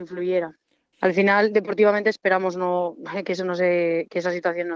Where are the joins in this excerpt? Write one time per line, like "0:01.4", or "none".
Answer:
0:00.9